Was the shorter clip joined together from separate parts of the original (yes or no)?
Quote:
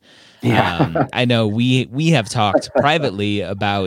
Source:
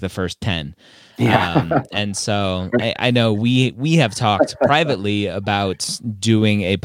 yes